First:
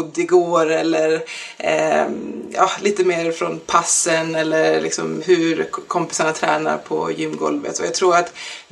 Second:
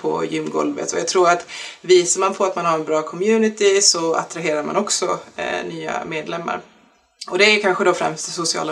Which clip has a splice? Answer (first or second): first